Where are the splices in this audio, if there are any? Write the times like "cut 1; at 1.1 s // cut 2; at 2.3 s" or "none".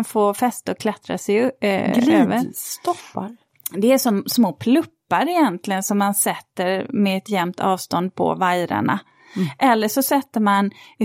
none